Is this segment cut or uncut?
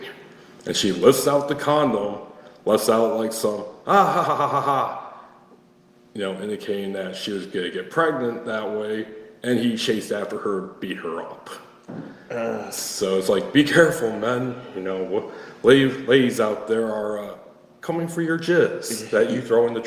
cut